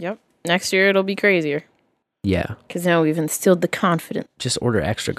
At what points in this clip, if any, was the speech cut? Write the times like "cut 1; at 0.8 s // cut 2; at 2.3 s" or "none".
cut 1; at 4.3 s